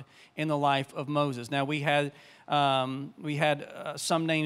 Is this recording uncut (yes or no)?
yes